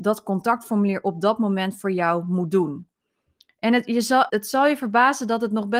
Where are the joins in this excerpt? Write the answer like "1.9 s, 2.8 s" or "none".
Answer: 4.3 s